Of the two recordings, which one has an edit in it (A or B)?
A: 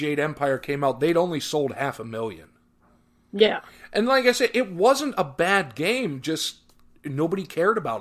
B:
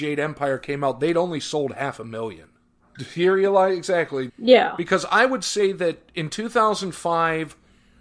B